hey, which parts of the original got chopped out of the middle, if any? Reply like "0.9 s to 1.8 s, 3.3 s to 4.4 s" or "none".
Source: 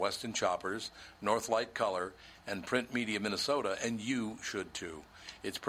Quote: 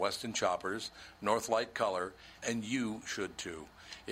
2.4 s to 3.8 s

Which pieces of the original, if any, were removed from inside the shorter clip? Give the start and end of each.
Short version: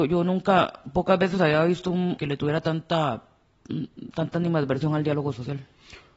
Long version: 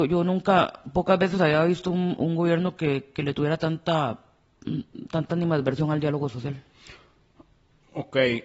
2.2 s to 3.1 s

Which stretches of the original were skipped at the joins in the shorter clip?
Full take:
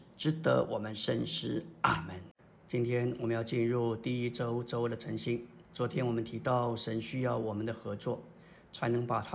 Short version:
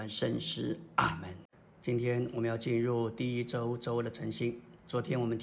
none

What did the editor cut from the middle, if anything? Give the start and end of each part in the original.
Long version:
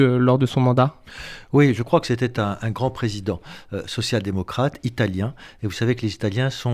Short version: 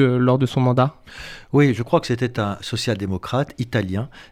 2.6 s to 3.8 s

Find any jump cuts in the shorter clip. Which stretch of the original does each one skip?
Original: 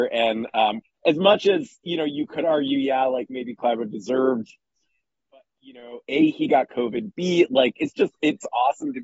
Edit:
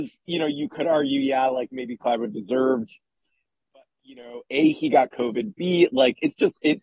none

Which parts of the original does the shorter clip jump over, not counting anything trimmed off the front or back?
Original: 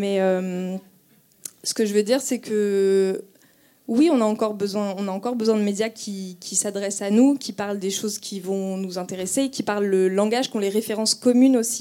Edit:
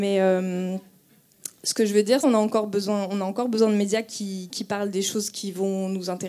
2.2 s to 4.1 s, 6.4 s to 7.4 s

